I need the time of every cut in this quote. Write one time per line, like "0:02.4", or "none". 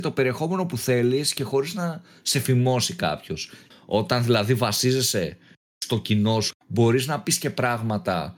0:03.7
0:06.5